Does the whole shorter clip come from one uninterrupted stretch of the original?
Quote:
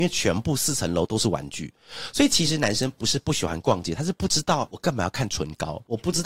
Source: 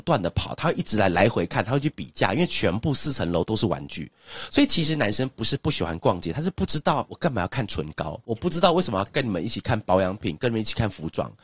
yes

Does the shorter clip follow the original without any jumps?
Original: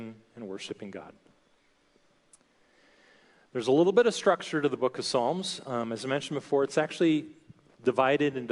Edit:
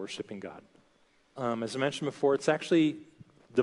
no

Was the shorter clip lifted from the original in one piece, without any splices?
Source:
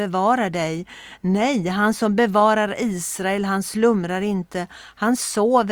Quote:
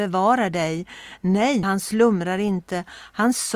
no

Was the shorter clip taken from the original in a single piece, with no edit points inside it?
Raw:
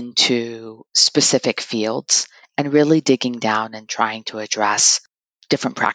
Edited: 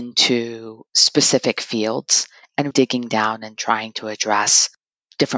no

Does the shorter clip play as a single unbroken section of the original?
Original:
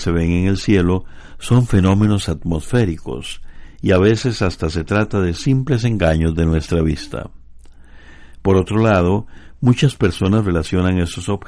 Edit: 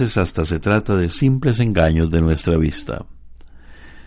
yes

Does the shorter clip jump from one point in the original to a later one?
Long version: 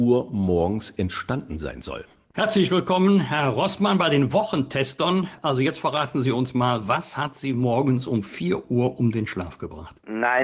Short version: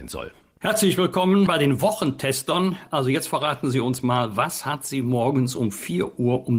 yes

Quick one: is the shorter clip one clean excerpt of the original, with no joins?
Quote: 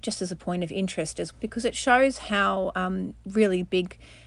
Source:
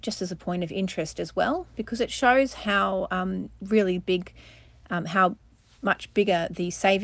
no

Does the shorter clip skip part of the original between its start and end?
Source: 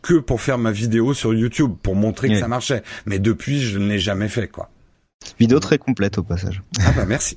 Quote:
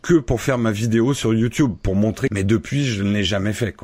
yes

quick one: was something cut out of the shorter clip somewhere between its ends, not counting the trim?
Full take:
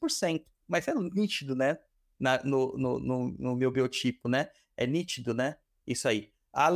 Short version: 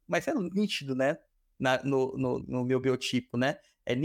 yes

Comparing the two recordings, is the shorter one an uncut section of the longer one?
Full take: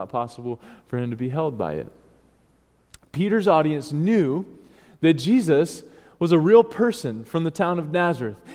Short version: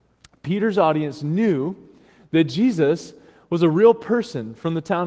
yes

